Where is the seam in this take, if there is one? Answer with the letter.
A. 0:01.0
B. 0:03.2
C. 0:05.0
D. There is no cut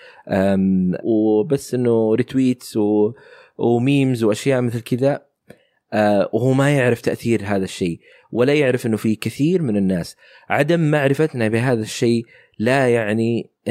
A